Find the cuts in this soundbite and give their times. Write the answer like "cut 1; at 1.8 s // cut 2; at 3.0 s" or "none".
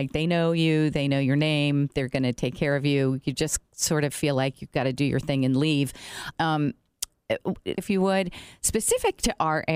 cut 1; at 6.3 s // cut 2; at 7.8 s